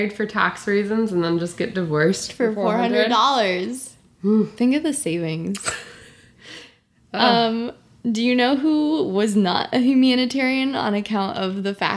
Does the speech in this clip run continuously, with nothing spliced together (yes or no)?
yes